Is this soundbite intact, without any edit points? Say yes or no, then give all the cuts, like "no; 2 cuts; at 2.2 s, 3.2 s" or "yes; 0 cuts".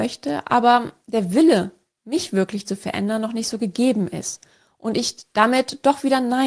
yes; 0 cuts